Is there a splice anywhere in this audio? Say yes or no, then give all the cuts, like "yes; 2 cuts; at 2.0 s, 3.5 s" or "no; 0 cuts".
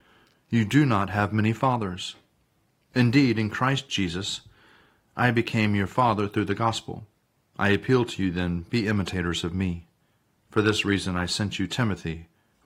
no; 0 cuts